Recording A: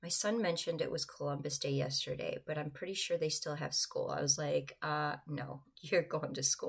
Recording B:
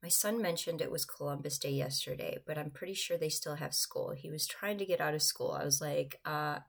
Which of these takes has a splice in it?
A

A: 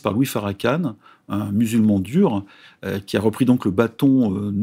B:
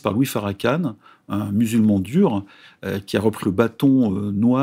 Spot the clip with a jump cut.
B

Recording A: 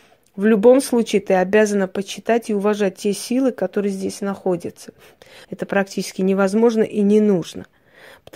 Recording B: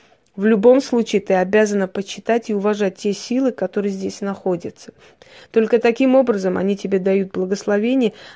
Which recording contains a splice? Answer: A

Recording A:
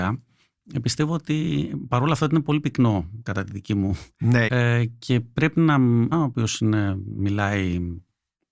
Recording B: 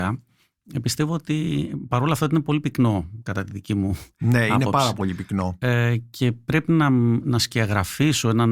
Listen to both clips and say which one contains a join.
A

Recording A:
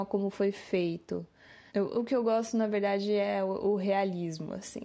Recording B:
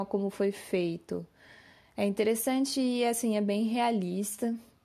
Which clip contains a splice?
A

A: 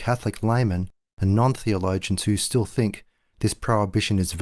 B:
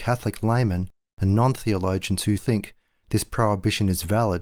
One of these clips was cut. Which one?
B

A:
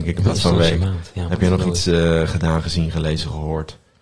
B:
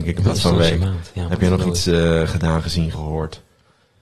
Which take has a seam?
B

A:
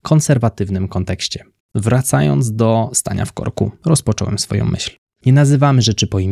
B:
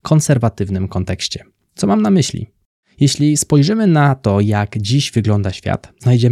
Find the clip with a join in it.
A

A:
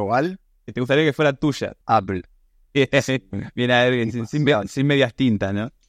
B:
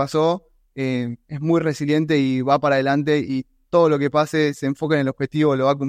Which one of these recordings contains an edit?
A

